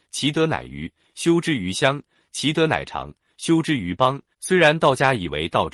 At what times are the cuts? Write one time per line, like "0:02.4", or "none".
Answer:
0:04.3